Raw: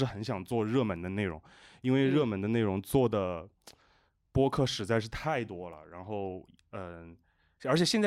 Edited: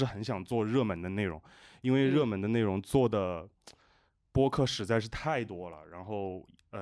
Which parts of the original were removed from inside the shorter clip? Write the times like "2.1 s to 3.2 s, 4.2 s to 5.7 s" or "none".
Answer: none